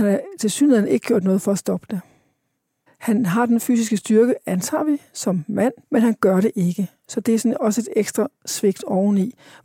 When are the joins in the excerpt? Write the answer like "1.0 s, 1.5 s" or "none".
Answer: 2.9 s, 5.8 s